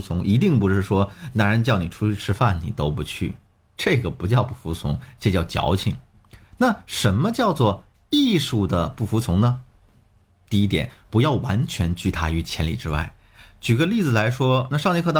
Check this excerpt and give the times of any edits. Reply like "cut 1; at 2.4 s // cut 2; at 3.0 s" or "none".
none